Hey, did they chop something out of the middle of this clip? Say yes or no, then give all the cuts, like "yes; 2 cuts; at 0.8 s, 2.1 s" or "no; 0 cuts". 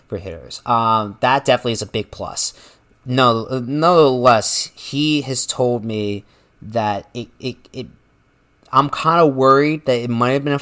no; 0 cuts